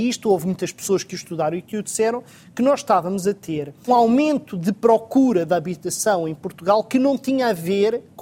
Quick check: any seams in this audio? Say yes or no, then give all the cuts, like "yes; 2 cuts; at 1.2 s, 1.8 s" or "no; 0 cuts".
yes; 1 cut; at 3.9 s